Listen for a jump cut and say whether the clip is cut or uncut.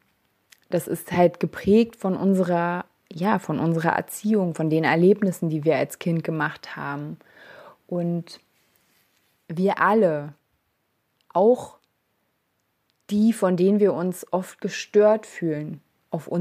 uncut